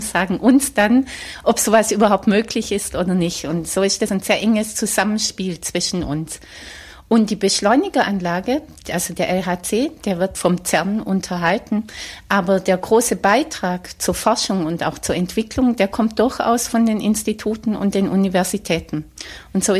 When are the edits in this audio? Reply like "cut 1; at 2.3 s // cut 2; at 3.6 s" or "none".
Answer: cut 1; at 4.1 s